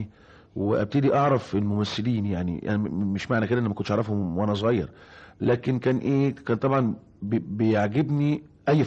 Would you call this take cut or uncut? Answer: cut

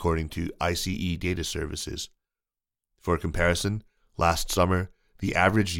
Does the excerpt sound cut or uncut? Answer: uncut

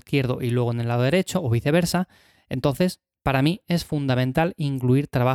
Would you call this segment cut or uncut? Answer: uncut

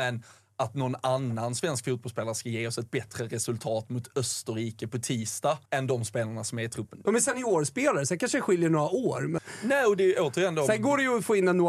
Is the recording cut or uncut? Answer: cut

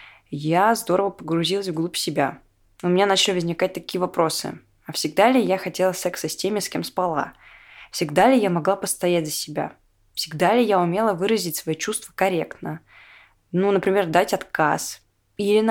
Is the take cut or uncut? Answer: uncut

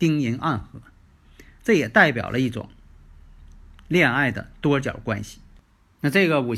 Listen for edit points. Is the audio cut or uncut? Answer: uncut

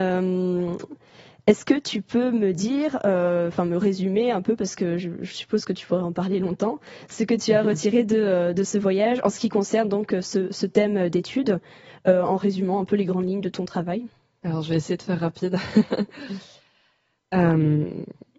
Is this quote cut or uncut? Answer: uncut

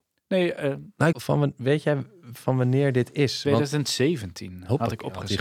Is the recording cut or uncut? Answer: cut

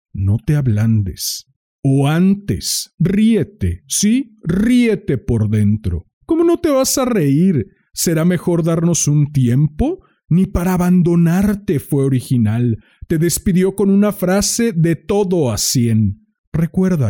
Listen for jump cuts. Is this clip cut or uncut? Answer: cut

